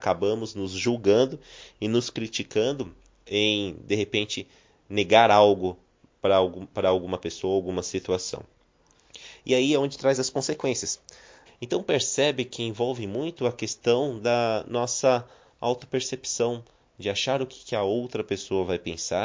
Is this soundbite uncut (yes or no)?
no